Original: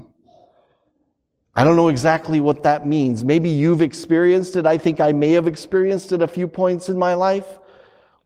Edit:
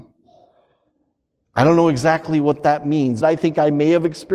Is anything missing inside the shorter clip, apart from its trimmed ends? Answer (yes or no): yes